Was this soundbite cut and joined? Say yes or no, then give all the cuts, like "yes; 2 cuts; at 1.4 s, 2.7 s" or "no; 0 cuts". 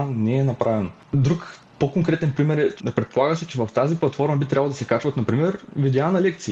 no; 0 cuts